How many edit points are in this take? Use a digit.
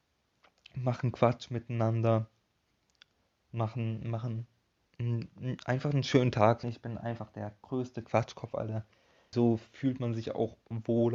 2